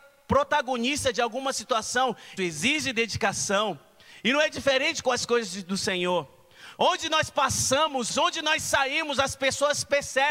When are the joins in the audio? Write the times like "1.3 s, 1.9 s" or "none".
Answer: 2.4 s, 6.8 s, 8.1 s